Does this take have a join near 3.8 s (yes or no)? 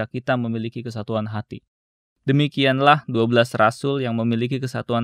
no